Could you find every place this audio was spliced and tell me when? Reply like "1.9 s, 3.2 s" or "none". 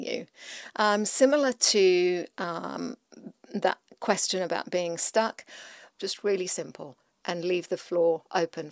5.9 s